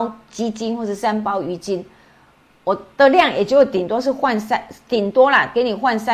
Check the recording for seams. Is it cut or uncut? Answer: uncut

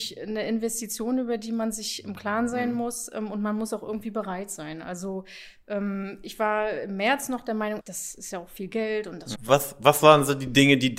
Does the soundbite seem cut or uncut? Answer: cut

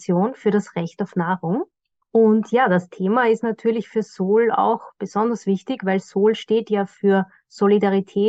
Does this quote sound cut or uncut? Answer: uncut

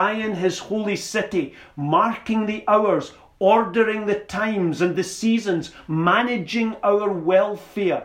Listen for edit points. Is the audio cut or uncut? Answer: uncut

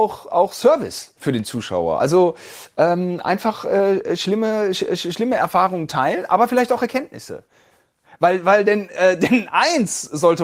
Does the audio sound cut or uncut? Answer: uncut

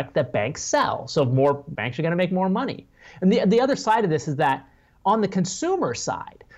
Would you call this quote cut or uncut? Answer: cut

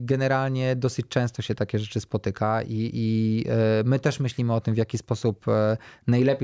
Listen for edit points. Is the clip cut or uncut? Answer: uncut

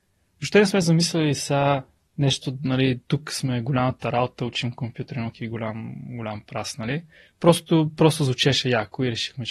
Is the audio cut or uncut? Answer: uncut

